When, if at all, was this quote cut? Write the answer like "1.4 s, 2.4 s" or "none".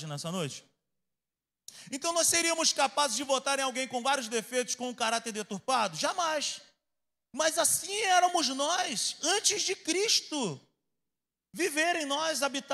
none